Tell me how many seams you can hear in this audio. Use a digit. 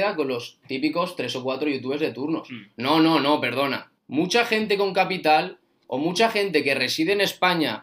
1